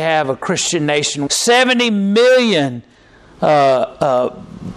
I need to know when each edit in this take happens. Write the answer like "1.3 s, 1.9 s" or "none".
1.3 s